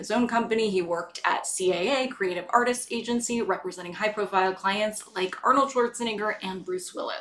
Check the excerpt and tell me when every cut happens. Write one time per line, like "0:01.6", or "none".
none

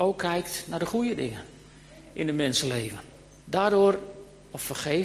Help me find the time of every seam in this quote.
0:03.4

